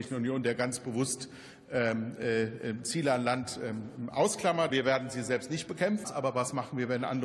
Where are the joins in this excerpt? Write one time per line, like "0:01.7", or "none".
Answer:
0:04.7
0:06.0